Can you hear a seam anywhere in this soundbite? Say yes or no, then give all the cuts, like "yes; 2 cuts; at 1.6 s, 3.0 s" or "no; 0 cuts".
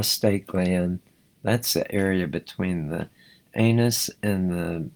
yes; 1 cut; at 1.2 s